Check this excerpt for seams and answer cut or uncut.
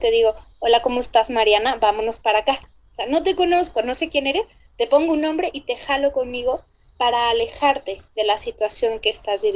cut